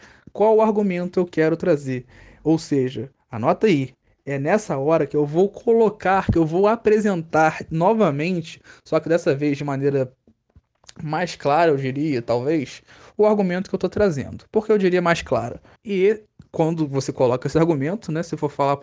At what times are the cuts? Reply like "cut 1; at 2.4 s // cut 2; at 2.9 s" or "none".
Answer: cut 1; at 15.8 s